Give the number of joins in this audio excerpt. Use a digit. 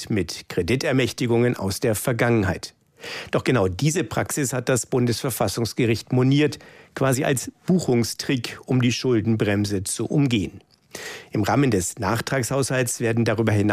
0